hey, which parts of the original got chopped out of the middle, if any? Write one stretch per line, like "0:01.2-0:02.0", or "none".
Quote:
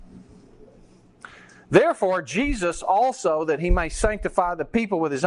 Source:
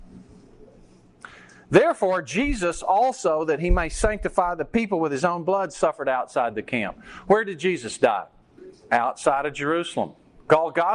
none